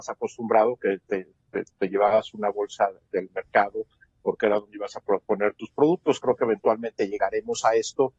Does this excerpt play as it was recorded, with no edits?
yes; 0 cuts

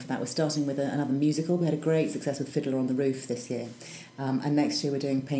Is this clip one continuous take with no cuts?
yes; 0 cuts

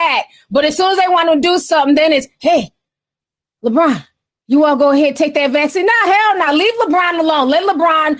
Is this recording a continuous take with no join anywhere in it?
yes; 0 cuts

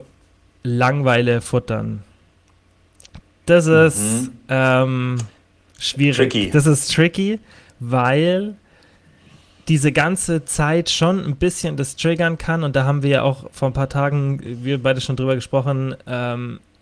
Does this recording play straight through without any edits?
yes; 0 cuts

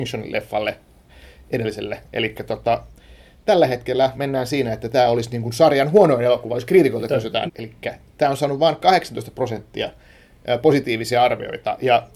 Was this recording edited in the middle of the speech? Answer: yes; 2 cuts; at 4.1 s, 7.5 s

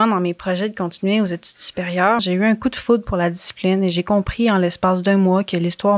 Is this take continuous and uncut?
no; 1 cut; at 2.2 s

